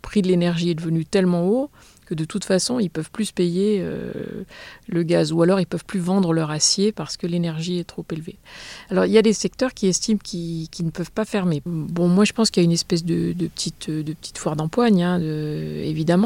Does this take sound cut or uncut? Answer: uncut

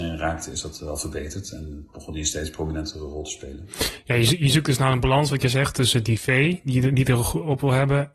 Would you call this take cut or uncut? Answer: uncut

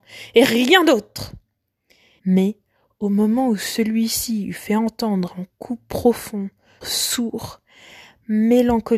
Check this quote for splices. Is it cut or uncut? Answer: cut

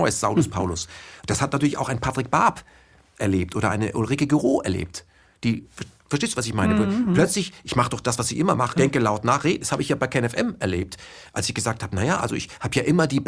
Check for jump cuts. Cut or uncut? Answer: cut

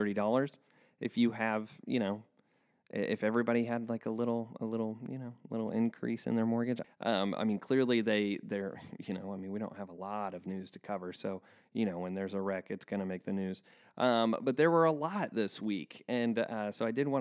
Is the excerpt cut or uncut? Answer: cut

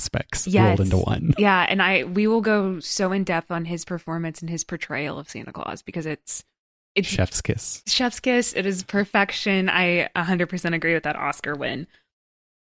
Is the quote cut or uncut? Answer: uncut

